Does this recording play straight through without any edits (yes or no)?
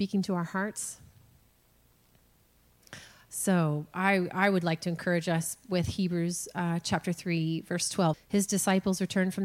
no